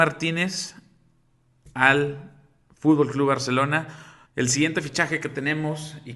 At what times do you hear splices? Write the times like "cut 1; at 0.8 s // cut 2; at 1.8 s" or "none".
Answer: cut 1; at 4.3 s